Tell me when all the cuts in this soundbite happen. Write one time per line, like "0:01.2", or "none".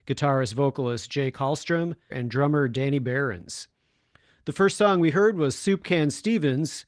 0:02.1